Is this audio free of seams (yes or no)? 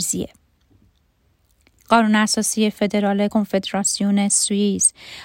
no